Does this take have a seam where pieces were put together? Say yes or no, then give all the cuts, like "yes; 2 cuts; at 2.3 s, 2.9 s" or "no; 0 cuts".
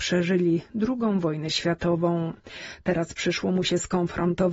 no; 0 cuts